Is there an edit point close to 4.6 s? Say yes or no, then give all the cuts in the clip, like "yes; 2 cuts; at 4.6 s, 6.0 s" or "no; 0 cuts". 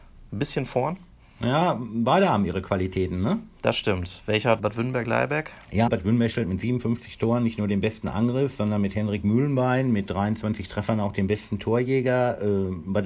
yes; 2 cuts; at 4.6 s, 5.9 s